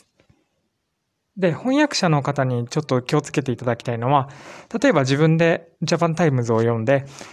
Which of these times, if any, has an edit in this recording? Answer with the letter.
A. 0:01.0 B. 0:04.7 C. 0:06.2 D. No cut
D